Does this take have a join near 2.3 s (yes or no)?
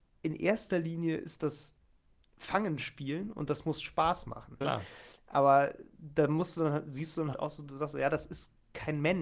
no